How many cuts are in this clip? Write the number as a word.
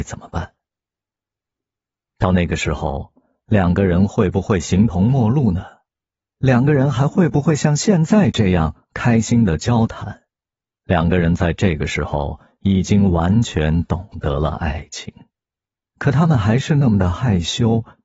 two